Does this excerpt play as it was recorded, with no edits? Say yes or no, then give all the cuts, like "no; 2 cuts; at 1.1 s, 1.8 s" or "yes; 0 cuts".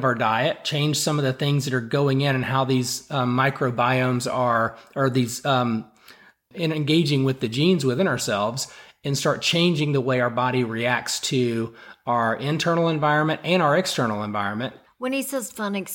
no; 2 cuts; at 6.5 s, 14.9 s